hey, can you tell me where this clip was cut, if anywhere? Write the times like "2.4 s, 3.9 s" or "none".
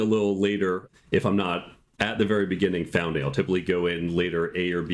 none